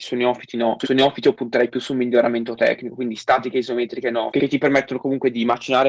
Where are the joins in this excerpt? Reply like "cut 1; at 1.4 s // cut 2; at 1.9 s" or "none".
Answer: cut 1; at 4.3 s